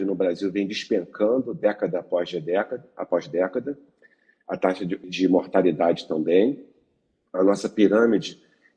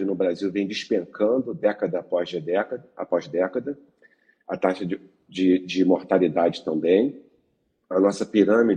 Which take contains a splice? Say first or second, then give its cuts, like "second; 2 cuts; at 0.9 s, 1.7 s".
first; 1 cut; at 5.0 s